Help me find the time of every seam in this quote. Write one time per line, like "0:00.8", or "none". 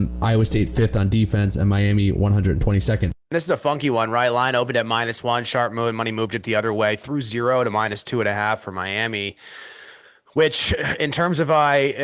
none